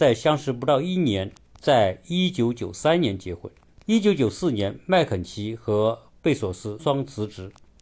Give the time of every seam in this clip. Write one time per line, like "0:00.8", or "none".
0:06.8